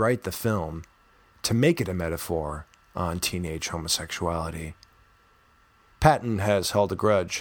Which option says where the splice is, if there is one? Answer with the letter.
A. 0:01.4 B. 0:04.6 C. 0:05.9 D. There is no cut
C